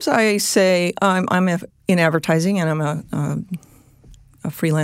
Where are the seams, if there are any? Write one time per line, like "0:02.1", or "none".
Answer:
0:01.7